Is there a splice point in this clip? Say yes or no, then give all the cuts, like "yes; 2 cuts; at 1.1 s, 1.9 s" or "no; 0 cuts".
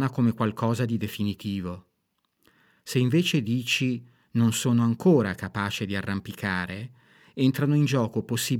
no; 0 cuts